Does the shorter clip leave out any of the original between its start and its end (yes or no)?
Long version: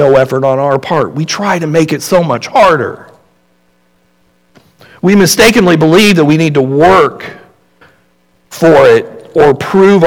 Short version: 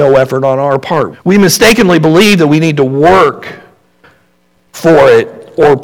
yes